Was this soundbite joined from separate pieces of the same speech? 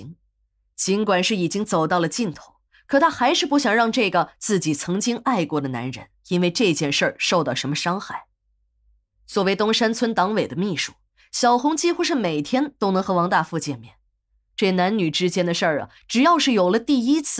no; 0 cuts

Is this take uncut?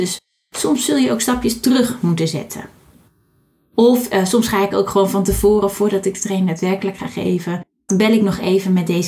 no; 1 cut; at 7.9 s

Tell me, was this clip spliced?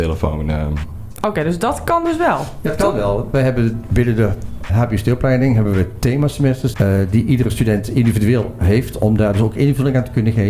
yes; 2 cuts; at 4.7 s, 6.7 s

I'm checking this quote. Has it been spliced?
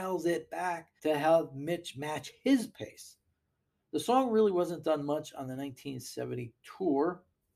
yes; 1 cut; at 1.0 s

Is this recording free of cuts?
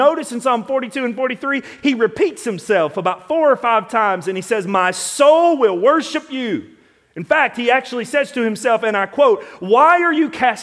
yes; 0 cuts

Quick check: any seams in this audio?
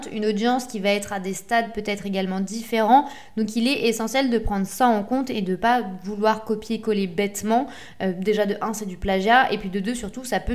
no; 0 cuts

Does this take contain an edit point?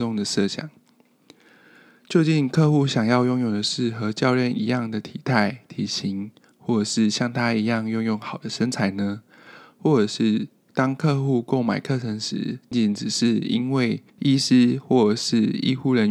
yes; 2 cuts; at 12.7 s, 14.1 s

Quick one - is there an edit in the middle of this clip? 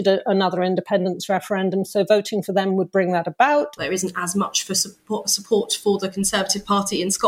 yes; 1 cut; at 3.8 s

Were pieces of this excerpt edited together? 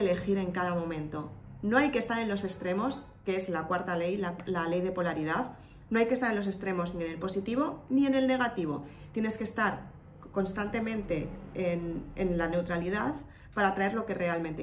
no; 0 cuts

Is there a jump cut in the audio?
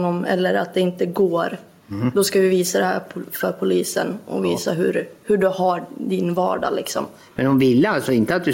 no; 0 cuts

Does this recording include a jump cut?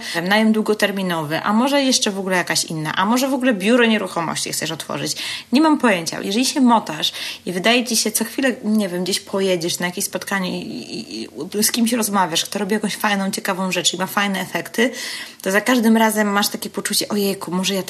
no; 0 cuts

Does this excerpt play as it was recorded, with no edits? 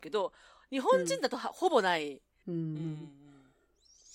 no; 1 cut; at 2.4 s

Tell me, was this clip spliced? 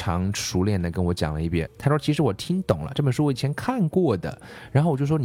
yes; 1 cut; at 1.7 s

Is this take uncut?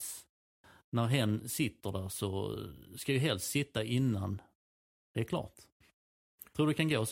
yes; 0 cuts

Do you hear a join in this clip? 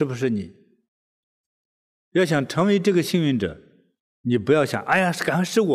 no; 0 cuts

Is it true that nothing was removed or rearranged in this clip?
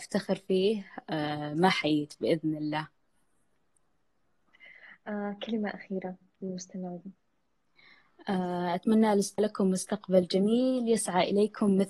no; 1 cut; at 9.4 s

